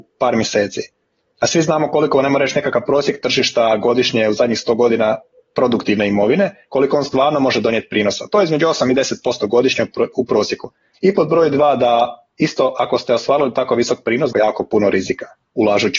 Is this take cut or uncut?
cut